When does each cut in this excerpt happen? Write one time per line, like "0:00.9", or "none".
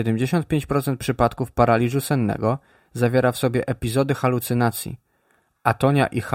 none